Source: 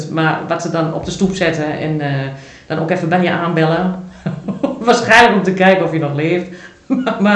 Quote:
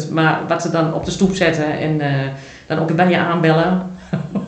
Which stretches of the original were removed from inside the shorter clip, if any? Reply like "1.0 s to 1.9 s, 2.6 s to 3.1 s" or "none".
2.9 s to 3.0 s